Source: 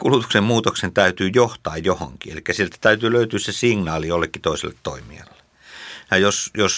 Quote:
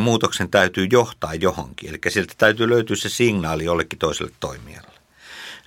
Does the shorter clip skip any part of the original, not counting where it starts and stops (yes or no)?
no